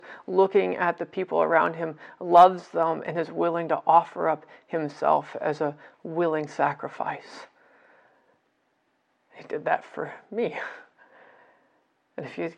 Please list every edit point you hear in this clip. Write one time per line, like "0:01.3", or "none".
none